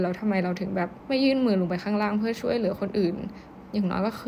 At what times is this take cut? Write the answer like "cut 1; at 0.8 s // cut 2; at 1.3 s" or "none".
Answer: cut 1; at 1.0 s